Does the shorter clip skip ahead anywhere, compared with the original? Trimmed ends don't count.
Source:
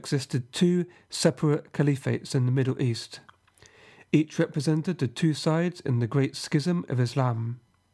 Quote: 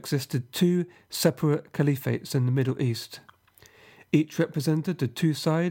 no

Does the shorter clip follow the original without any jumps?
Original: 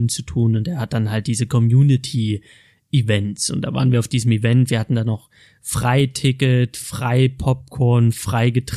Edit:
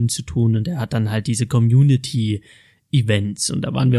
yes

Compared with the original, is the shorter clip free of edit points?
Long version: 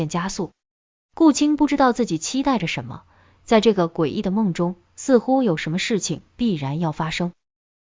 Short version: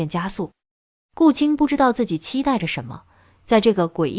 yes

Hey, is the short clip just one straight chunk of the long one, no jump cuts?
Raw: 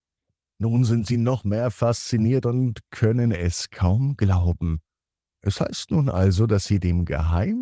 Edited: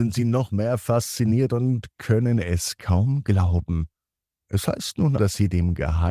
no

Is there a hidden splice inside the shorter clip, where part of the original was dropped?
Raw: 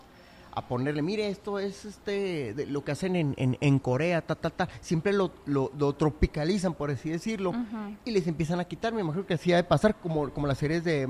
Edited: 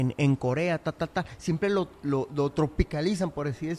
no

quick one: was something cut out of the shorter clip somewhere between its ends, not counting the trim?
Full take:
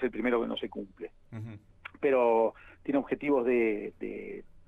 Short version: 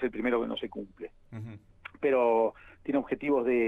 no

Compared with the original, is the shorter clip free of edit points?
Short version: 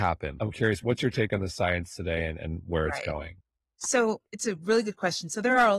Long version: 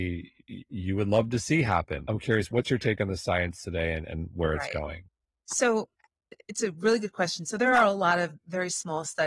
no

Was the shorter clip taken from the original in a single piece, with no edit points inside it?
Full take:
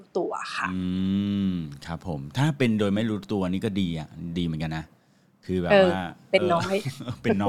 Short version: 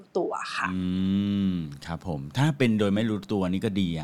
yes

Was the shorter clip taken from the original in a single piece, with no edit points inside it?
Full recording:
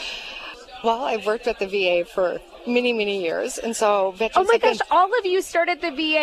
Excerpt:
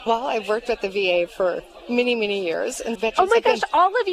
no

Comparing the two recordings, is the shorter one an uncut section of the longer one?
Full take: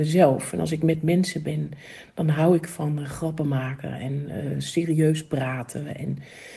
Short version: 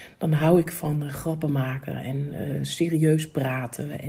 yes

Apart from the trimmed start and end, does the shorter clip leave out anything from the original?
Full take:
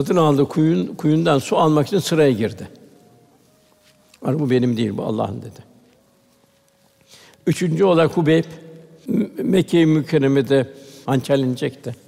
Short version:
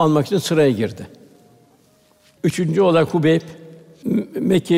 yes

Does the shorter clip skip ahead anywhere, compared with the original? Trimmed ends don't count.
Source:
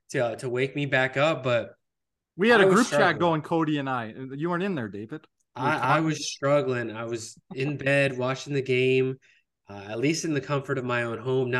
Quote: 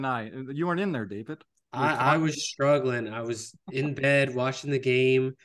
no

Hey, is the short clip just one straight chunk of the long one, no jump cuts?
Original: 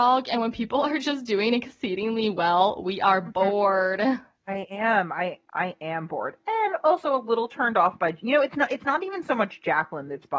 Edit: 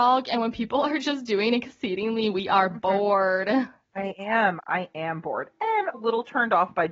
no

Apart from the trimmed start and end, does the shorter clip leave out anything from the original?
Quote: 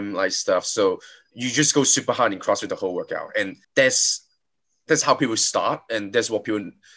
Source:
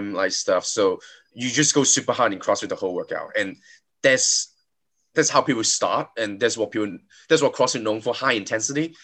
yes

